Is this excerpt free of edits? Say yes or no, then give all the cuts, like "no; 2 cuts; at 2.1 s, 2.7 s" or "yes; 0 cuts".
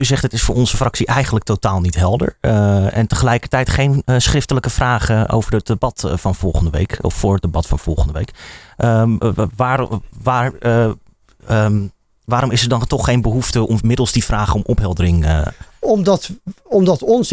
no; 1 cut; at 5.3 s